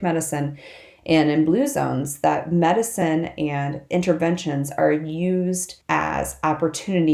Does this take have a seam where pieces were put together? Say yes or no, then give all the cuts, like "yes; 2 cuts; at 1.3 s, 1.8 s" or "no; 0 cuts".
yes; 1 cut; at 5.8 s